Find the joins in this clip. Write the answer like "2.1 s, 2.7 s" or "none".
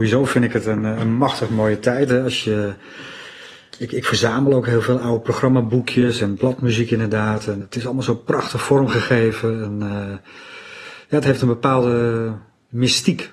7.6 s